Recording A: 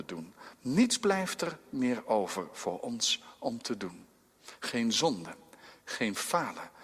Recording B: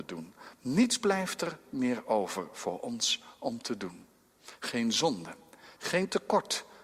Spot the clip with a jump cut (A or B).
B